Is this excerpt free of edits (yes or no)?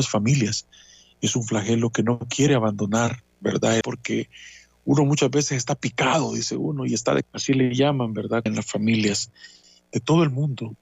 no